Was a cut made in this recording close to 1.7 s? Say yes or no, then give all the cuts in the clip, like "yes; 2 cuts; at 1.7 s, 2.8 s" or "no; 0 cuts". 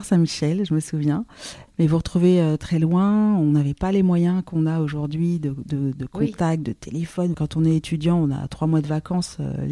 yes; 2 cuts; at 1.7 s, 7.3 s